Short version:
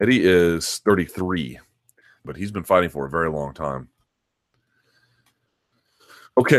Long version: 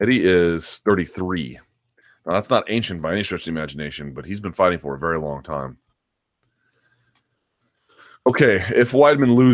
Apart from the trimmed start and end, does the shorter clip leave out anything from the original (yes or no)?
yes